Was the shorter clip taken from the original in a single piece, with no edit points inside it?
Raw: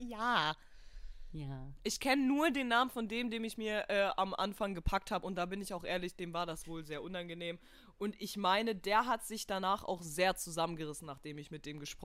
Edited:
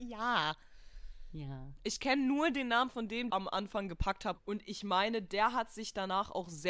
no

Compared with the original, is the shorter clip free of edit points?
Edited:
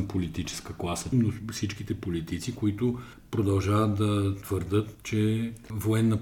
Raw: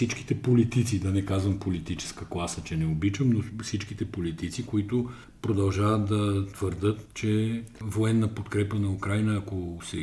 no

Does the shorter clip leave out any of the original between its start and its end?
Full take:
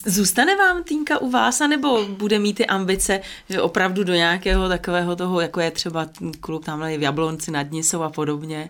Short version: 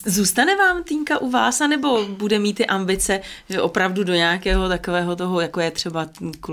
no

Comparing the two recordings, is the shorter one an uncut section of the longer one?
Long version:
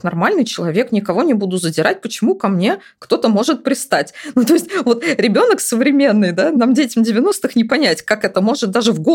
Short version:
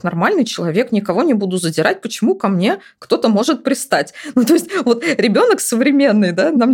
yes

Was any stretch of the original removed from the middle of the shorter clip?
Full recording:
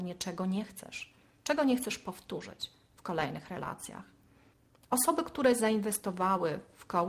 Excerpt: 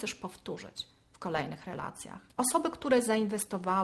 yes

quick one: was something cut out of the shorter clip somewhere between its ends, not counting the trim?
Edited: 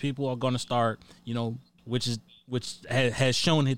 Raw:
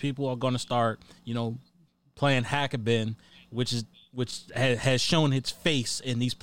yes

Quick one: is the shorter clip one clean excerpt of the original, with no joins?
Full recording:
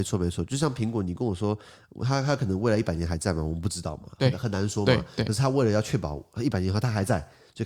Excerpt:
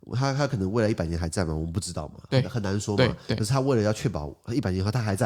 yes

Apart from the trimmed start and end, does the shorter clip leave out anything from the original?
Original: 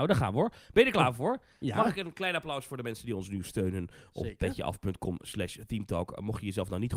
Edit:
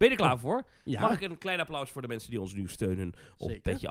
no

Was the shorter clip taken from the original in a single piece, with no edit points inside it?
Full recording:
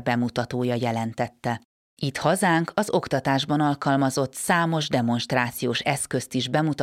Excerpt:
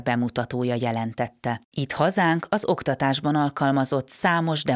no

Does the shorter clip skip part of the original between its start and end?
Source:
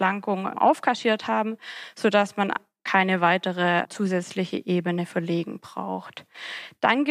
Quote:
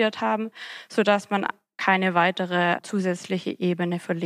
no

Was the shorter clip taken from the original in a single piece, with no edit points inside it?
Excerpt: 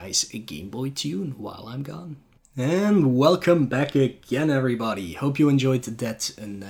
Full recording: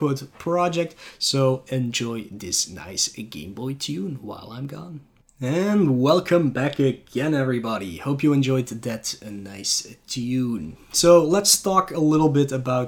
yes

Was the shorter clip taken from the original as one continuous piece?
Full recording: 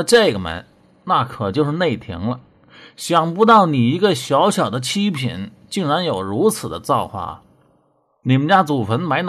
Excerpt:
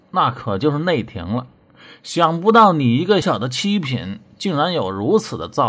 no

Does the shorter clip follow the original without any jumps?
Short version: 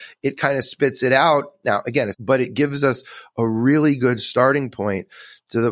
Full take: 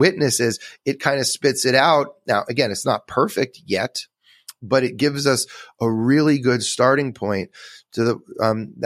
no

